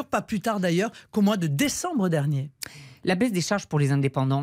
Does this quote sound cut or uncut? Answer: uncut